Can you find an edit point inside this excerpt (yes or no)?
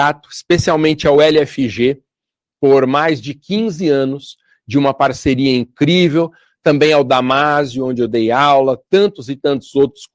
no